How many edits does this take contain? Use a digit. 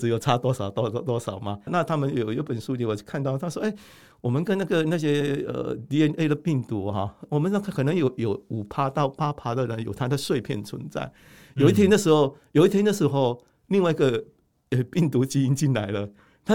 1